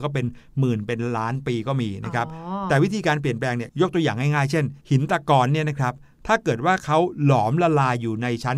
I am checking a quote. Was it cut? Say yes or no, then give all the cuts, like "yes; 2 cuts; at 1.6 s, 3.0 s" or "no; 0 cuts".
yes; 2 cuts; at 3.7 s, 4.8 s